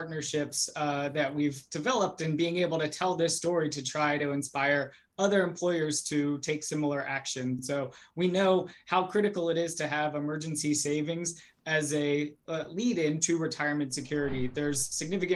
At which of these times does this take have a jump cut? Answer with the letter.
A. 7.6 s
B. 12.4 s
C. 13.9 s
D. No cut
D